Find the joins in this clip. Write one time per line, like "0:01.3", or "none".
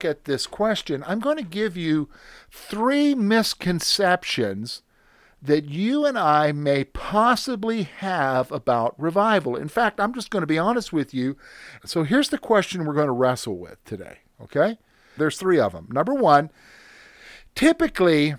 0:11.8
0:15.2